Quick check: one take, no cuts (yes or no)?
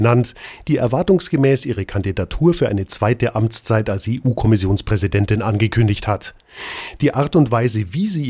yes